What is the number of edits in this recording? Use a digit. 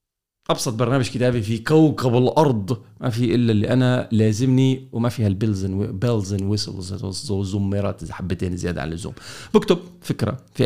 0